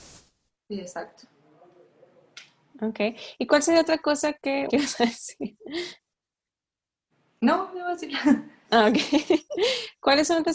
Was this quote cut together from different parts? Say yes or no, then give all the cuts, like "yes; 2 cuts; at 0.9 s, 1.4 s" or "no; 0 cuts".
yes; 1 cut; at 4.7 s